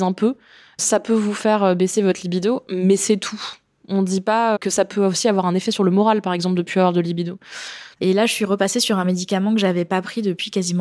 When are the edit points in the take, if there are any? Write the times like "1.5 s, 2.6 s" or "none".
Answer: 4.6 s, 7.9 s